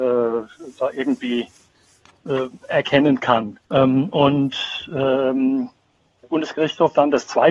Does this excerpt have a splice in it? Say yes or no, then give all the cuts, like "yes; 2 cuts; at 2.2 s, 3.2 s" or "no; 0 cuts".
yes; 2 cuts; at 3.7 s, 6.2 s